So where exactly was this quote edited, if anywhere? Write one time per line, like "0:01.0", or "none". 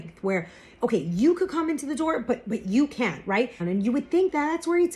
0:03.6